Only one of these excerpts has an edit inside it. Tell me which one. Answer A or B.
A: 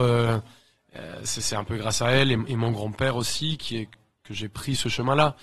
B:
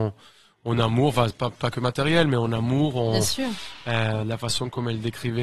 B